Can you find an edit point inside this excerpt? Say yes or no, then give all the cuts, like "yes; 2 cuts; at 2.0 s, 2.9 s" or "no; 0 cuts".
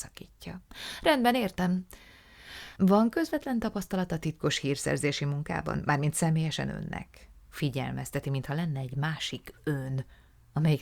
yes; 1 cut; at 2.8 s